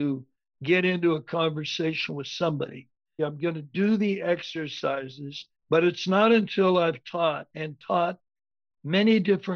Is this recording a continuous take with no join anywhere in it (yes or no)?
no